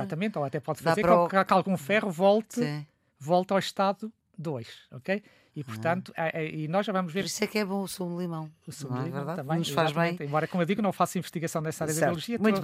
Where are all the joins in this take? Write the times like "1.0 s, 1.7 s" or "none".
none